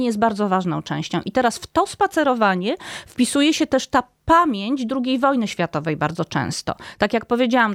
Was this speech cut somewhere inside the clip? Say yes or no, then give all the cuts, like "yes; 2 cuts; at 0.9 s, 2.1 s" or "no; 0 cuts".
no; 0 cuts